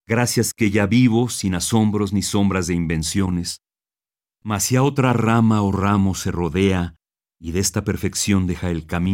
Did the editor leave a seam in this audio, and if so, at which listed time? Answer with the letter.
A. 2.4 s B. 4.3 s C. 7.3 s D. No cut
B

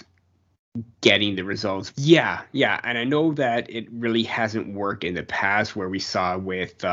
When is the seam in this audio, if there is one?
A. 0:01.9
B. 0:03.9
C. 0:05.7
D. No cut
A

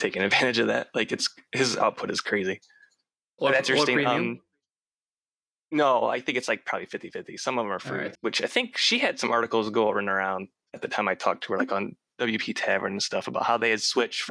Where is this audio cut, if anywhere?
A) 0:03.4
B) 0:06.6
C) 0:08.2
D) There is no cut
C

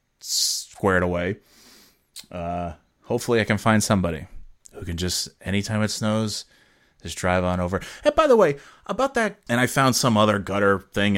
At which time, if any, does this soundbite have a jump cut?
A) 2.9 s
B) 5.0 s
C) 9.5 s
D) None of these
C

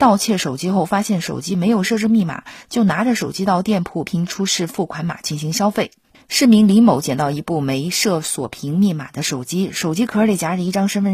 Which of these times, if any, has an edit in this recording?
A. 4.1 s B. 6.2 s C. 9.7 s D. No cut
A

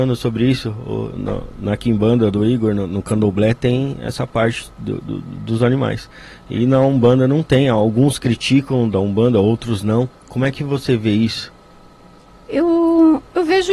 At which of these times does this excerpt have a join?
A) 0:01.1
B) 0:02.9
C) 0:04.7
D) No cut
A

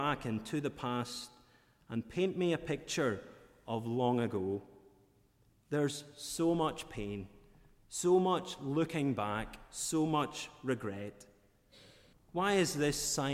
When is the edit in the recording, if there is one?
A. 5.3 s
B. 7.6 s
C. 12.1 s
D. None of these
C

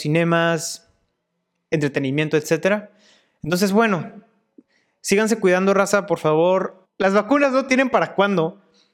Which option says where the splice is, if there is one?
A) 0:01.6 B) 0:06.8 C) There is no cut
B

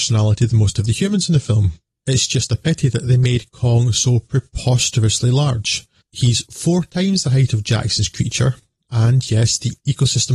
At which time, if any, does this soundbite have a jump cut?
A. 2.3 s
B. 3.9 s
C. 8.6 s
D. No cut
D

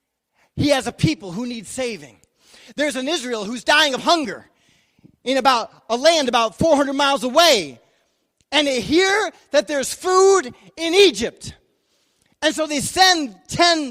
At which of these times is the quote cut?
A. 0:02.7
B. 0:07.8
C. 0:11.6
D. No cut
D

